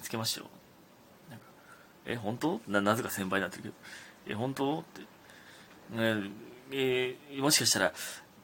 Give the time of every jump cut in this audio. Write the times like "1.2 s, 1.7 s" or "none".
none